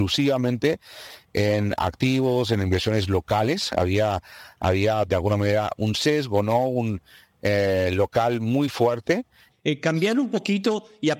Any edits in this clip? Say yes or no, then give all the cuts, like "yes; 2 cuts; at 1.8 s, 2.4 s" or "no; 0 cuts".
yes; 2 cuts; at 5.7 s, 9.5 s